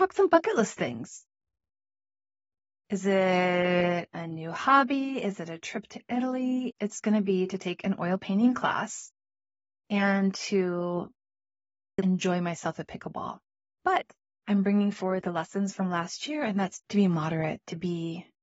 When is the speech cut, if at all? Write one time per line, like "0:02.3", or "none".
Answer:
0:06.7
0:12.0
0:13.6